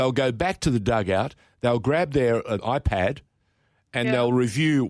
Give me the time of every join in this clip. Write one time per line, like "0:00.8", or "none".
0:02.6

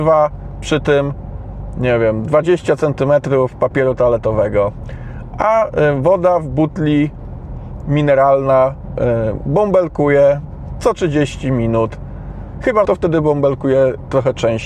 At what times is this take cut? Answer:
0:12.8

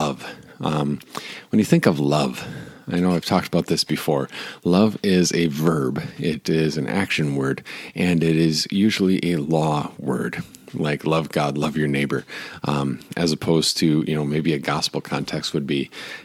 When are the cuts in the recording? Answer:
none

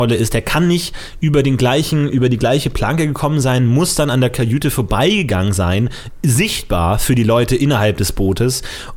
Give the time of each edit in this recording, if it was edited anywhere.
none

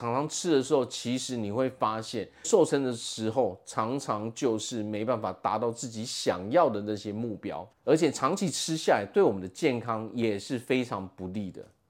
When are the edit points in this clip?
0:02.4
0:07.7

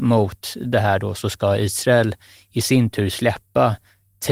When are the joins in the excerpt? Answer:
none

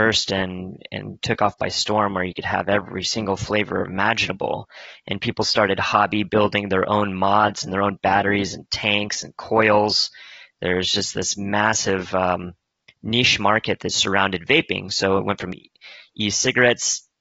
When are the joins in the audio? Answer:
none

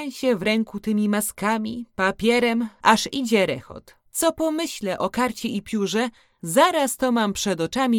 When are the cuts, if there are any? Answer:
0:02.8
0:04.1

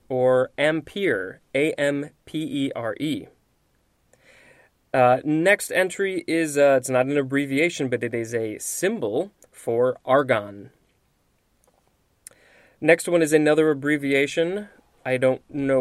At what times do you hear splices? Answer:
none

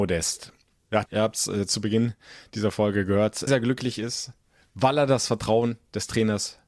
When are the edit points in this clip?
0:01.1
0:03.5

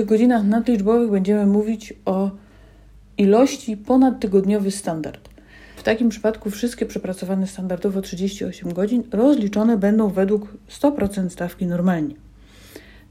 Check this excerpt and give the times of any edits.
0:05.8

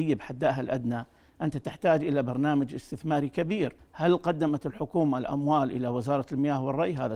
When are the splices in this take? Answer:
0:03.8

